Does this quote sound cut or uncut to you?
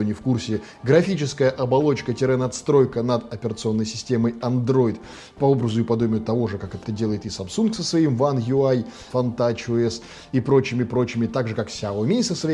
cut